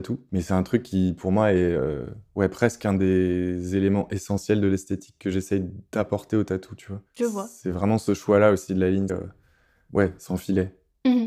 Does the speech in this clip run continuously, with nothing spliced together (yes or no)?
no